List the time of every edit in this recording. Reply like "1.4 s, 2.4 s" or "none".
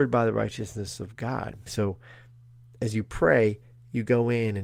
1.7 s